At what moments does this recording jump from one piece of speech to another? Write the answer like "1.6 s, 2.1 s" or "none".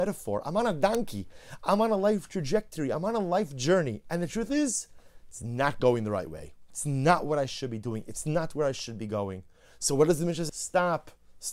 10.5 s